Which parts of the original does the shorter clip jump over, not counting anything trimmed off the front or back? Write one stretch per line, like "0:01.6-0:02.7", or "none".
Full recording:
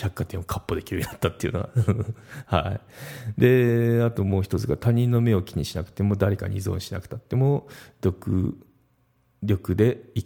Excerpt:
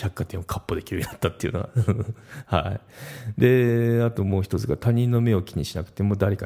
none